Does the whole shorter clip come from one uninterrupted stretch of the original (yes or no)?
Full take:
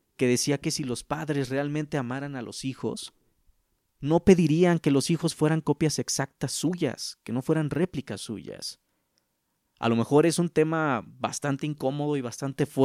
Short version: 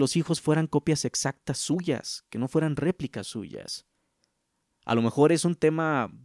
yes